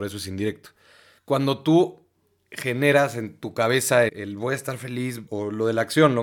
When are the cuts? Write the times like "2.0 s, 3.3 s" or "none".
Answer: 1.2 s, 4.1 s, 5.3 s